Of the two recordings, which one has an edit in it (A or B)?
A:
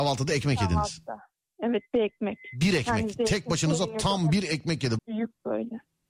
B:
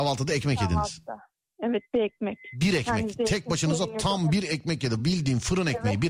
A